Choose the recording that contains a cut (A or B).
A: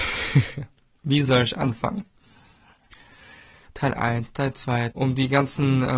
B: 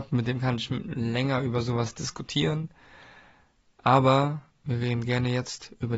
A